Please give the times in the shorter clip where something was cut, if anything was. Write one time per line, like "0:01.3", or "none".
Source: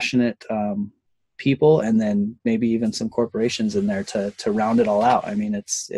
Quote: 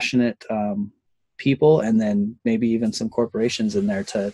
none